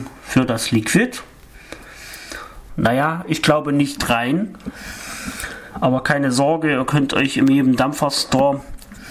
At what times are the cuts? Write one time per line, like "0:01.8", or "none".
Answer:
0:02.7

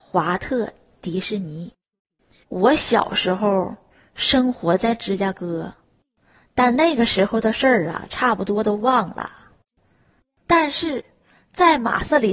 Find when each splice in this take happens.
0:02.4

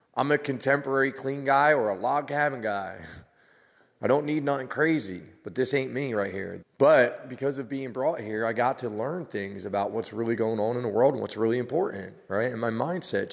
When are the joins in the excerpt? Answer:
0:06.6

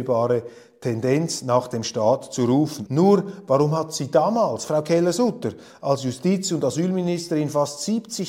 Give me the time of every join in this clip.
0:02.9

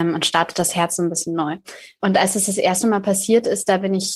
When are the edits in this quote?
none

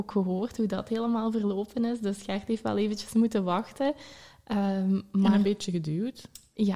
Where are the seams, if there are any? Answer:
none

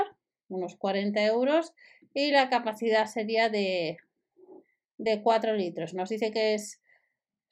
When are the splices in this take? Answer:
none

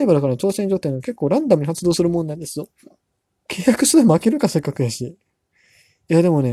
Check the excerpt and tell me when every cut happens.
0:03.5

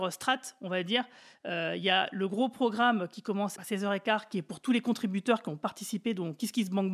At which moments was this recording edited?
none

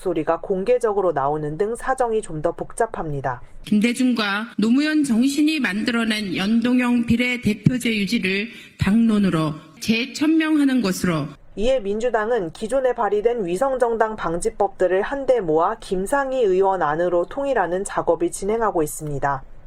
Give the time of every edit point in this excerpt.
0:03.6

